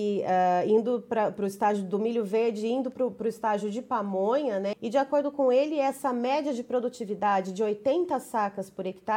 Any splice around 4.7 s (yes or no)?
yes